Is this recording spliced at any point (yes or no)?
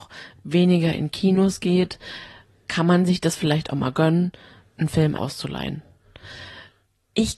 yes